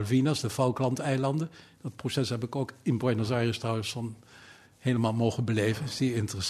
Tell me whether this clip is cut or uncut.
uncut